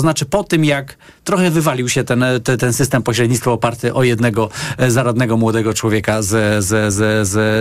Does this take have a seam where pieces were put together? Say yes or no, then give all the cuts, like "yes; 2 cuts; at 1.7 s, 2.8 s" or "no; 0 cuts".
no; 0 cuts